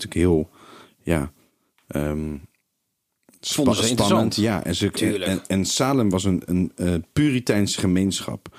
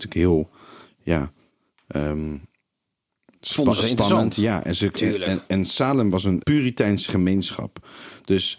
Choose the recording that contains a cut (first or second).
second